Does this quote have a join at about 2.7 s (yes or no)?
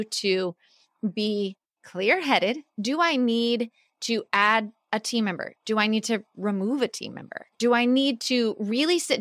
yes